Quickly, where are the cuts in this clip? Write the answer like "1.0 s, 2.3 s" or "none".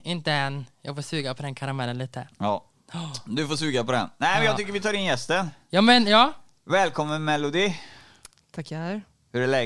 none

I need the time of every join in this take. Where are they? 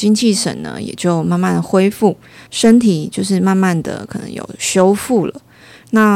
2.5 s

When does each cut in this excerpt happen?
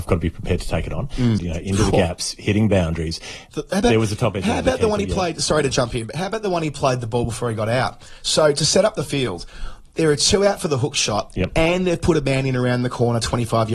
1.4 s, 3.5 s

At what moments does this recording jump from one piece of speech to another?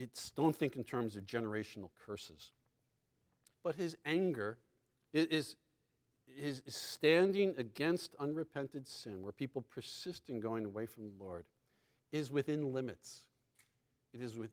3.5 s, 5.1 s

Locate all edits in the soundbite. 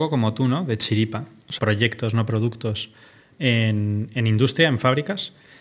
1.6 s

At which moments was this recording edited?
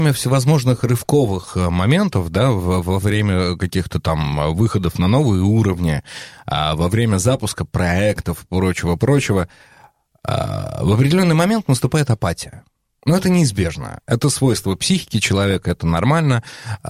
none

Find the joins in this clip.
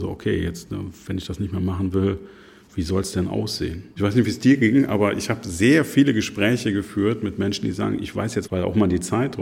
4.0 s, 8.5 s

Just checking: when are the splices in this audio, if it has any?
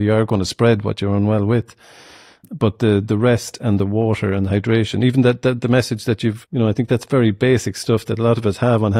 6.4 s

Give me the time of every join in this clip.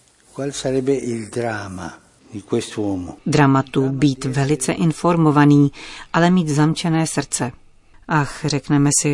3.2 s, 7.9 s

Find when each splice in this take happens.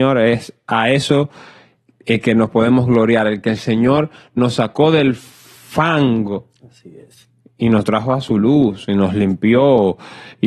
none

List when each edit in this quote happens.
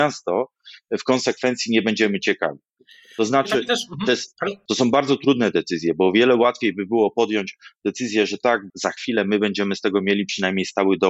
4.7 s, 8.7 s

